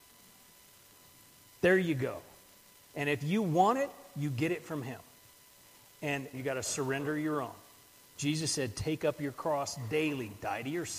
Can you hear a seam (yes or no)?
yes